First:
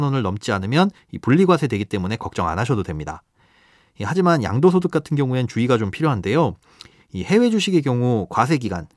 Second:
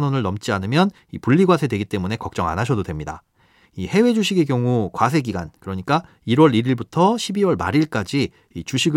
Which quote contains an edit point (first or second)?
second